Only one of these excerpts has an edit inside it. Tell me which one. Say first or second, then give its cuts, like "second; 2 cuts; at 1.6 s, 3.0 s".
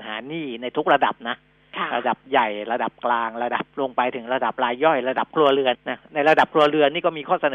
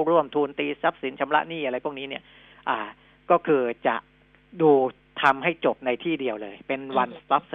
first; 2 cuts; at 3.7 s, 5.7 s